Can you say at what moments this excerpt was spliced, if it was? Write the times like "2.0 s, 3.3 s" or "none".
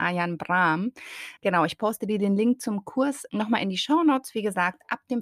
1.4 s, 3.3 s